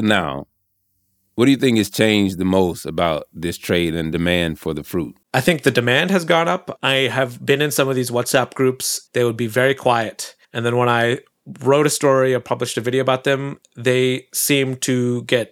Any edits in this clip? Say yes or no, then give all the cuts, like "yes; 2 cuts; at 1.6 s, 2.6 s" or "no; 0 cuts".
yes; 3 cuts; at 5.2 s, 9.1 s, 10.4 s